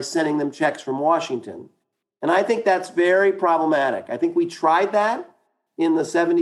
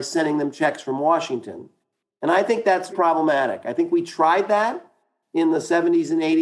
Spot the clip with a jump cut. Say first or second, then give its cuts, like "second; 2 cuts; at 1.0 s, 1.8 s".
second; 1 cut; at 2.9 s